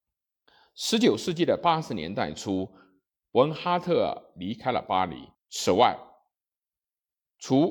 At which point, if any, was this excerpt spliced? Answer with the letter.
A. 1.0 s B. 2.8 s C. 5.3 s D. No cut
C